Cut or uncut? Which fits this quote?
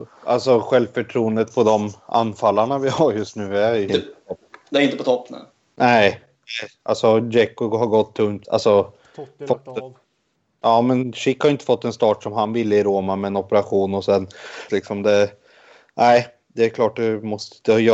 cut